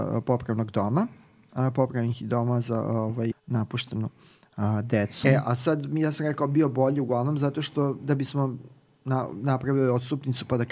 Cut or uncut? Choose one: cut